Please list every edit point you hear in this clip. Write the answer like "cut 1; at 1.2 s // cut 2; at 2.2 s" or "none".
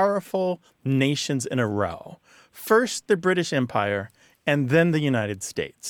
none